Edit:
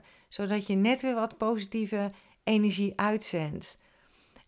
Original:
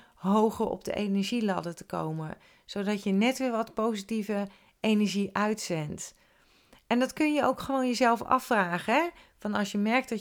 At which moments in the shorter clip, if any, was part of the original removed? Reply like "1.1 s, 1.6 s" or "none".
none